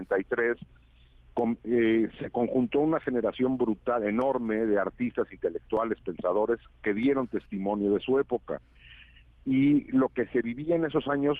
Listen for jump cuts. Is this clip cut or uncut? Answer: uncut